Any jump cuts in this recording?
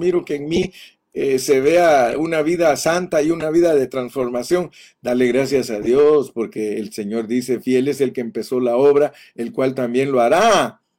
no; 0 cuts

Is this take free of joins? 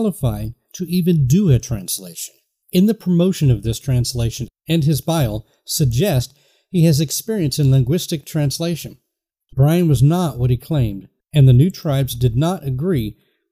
no; 1 cut; at 9.5 s

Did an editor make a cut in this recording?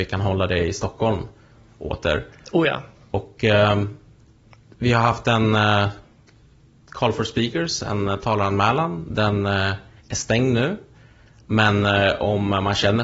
no; 0 cuts

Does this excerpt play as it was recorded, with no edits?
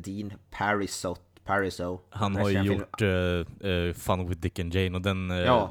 yes; 0 cuts

